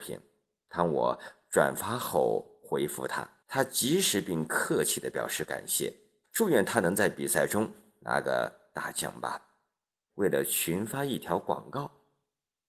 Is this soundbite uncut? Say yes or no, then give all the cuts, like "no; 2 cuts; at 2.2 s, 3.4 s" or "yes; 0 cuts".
no; 3 cuts; at 3.4 s, 6.2 s, 10.1 s